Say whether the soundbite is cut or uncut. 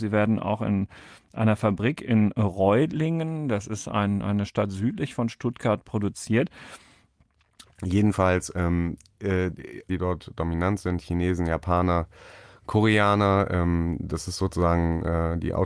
cut